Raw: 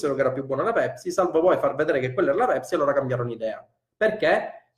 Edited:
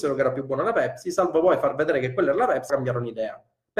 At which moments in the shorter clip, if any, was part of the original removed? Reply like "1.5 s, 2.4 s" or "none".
2.7 s